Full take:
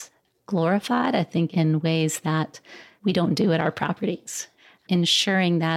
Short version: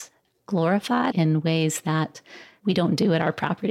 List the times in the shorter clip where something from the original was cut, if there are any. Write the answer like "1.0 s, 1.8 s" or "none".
1.1 s